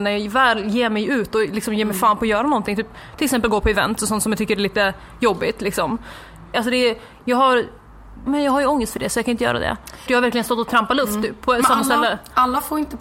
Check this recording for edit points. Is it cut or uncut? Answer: cut